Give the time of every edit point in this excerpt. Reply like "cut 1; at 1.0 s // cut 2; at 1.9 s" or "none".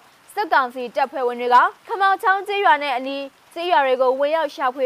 cut 1; at 1.8 s

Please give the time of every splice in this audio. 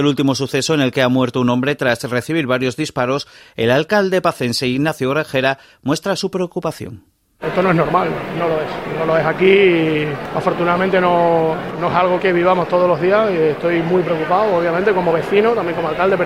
cut 1; at 12.2 s

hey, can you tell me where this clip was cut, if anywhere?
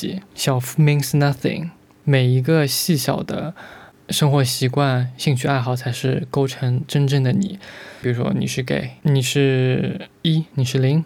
cut 1; at 8.0 s

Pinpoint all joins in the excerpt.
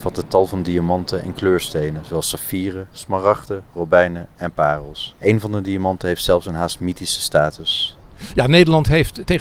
cut 1; at 5.2 s

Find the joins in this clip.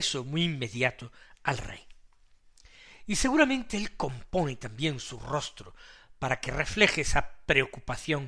none

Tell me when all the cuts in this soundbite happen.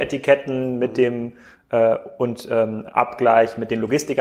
none

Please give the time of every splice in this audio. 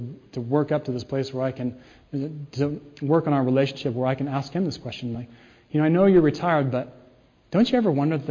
none

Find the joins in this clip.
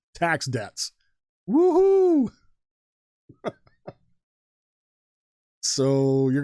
none

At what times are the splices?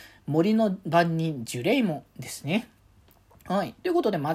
none

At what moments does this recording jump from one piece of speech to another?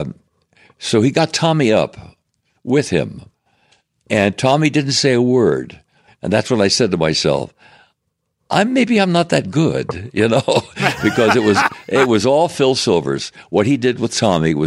cut 1; at 6.1 s

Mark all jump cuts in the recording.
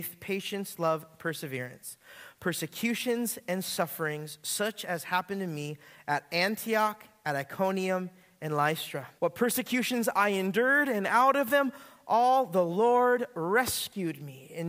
cut 1; at 9.2 s

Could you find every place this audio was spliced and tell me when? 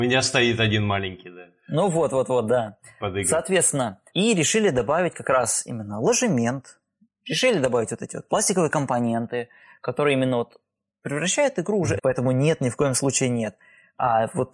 cut 1; at 4.1 s // cut 2; at 12.0 s

